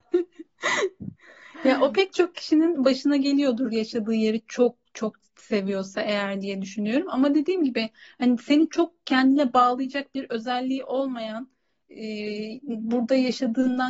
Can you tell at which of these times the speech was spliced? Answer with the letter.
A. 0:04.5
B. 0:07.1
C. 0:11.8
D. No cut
D